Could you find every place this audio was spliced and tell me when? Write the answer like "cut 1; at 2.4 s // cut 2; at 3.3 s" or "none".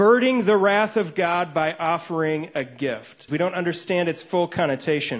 cut 1; at 3.3 s

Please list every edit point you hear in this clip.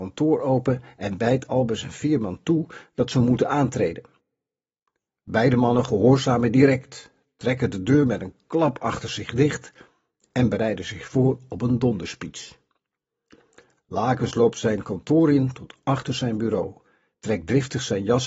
none

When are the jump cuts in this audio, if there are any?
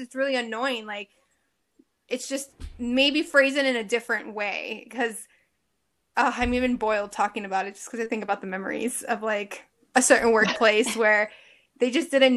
none

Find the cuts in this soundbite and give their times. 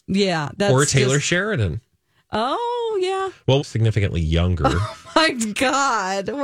cut 1; at 3.6 s

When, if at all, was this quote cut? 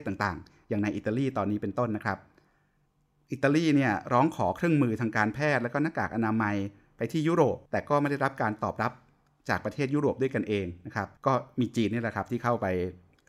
cut 1; at 7.7 s // cut 2; at 11.2 s

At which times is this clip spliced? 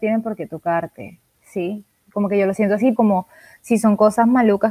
cut 1; at 2.9 s

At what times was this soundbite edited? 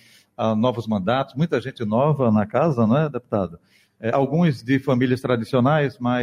none

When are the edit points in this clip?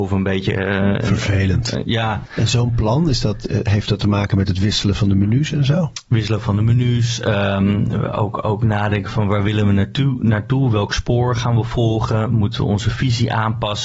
cut 1; at 2.3 s

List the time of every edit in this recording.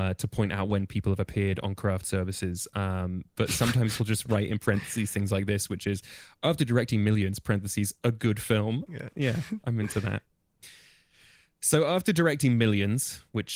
cut 1; at 8.9 s

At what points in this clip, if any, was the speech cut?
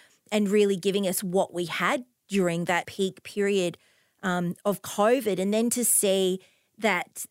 cut 1; at 2.8 s

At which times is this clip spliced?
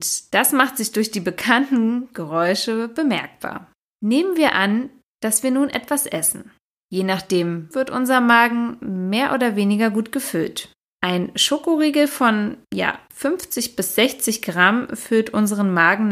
cut 1; at 7.7 s

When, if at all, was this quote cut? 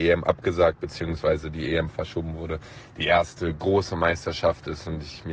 none

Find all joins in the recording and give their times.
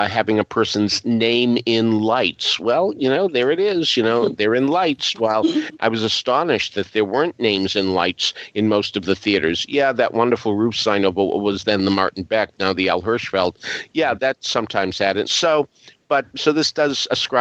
cut 1; at 5.8 s // cut 2; at 15.2 s // cut 3; at 16.3 s

